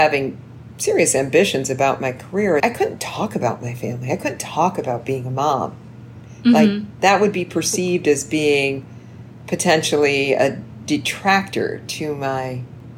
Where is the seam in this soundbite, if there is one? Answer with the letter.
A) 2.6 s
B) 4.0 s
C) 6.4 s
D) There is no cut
A